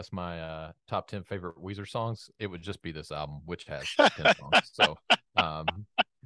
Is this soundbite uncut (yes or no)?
yes